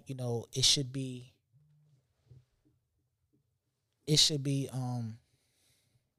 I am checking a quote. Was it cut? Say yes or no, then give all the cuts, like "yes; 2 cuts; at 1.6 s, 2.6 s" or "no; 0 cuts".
no; 0 cuts